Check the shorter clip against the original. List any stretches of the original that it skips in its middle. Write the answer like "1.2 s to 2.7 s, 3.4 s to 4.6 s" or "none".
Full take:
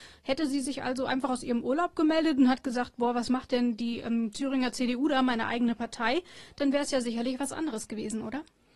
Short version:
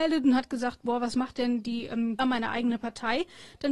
4.3 s to 5.2 s